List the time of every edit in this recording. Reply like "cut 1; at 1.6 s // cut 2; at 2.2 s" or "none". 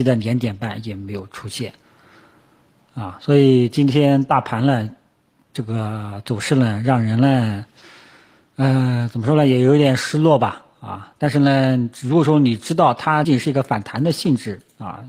cut 1; at 13.2 s

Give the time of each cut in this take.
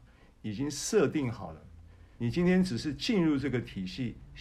cut 1; at 2.2 s

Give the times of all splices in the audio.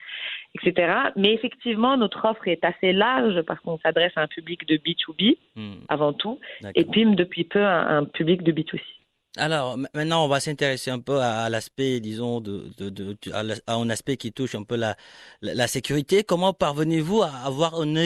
none

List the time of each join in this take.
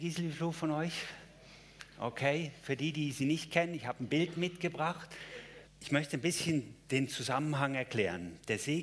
cut 1; at 5.7 s

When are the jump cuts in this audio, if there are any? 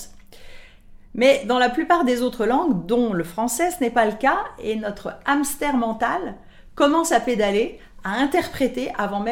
none

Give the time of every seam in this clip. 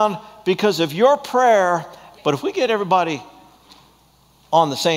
cut 1; at 2.2 s

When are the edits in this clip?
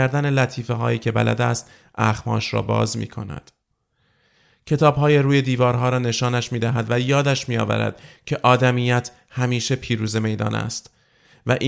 none

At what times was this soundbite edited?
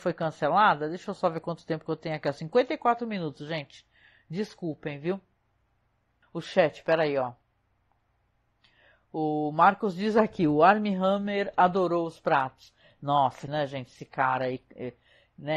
cut 1; at 6.2 s // cut 2; at 13.5 s

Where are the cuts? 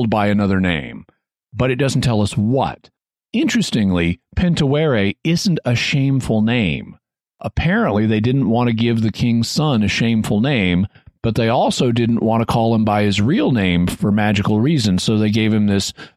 none

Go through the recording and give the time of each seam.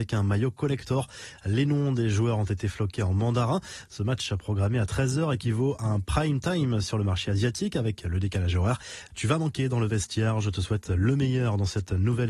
cut 1; at 9.1 s

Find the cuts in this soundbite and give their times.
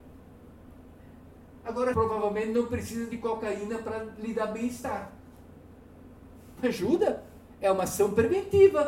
cut 1; at 1.9 s // cut 2; at 6.6 s

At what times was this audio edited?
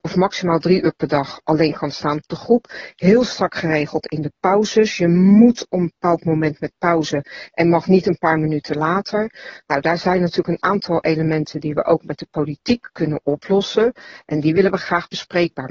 none

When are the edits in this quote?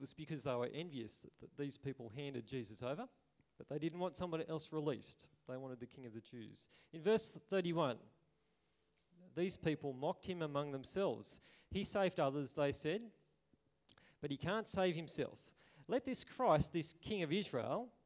none

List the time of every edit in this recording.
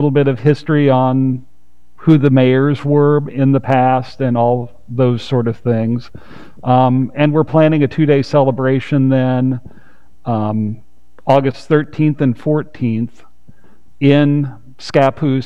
none

